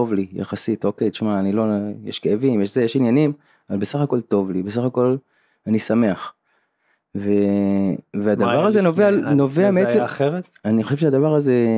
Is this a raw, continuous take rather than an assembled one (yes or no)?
yes